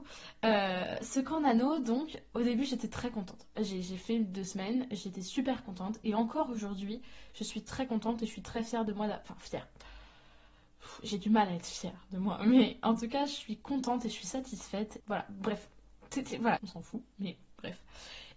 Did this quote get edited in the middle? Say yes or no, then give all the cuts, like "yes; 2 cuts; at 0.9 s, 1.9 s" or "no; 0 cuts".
yes; 2 cuts; at 15.0 s, 16.6 s